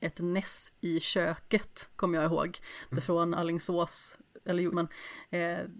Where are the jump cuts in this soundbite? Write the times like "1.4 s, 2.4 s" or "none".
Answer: 2.9 s, 4.7 s